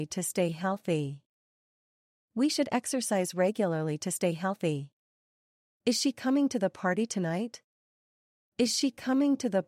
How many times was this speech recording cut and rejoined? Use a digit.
0